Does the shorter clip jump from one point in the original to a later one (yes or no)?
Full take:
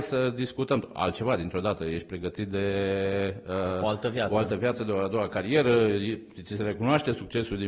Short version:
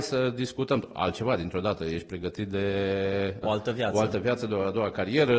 yes